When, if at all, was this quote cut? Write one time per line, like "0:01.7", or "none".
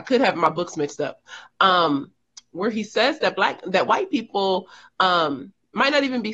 none